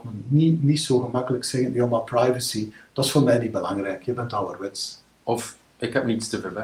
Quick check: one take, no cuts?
yes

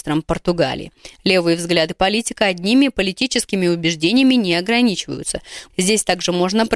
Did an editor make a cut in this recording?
yes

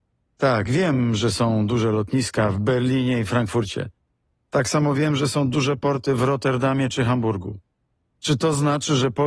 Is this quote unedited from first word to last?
yes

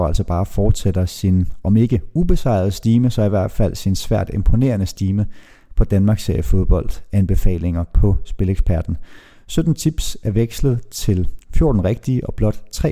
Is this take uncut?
yes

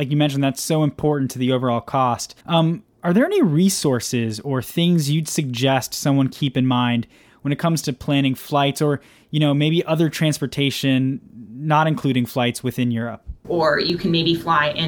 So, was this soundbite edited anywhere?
yes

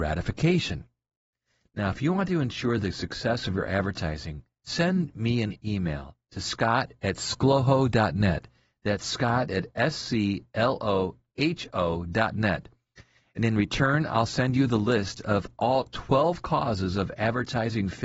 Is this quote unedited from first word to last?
yes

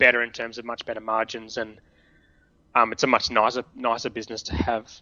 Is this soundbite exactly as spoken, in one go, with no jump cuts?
yes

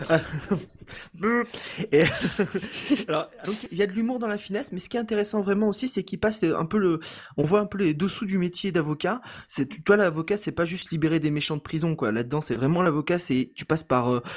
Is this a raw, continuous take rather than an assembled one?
no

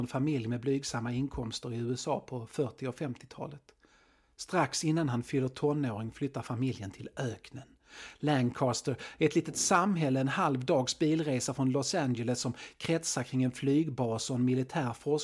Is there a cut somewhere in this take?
no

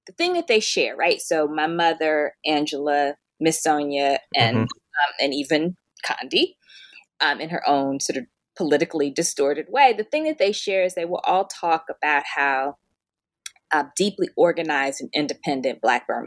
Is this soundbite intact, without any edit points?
yes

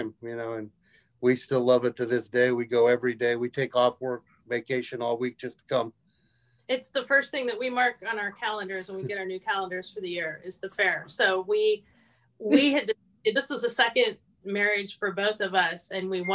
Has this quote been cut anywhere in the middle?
no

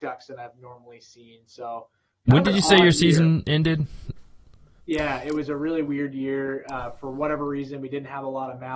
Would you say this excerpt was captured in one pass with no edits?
no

